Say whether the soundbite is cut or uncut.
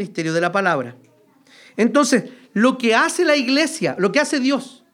uncut